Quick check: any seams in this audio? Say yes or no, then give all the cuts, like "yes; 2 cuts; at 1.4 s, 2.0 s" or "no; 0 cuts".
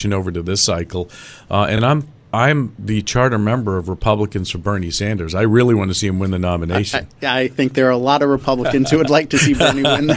no; 0 cuts